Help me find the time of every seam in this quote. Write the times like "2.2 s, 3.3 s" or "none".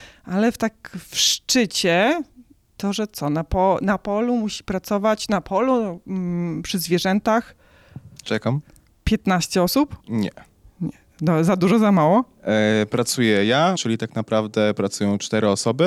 8.9 s, 10.0 s, 13.8 s